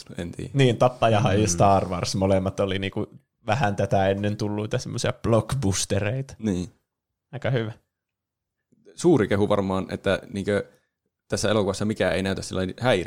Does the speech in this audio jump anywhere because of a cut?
no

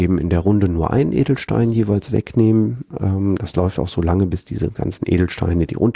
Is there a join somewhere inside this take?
no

